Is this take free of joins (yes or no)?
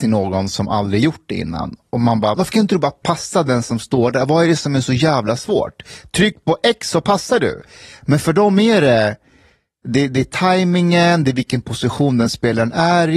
no